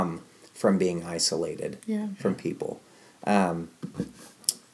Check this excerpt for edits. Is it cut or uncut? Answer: uncut